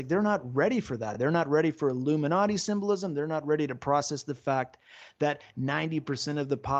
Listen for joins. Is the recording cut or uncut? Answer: uncut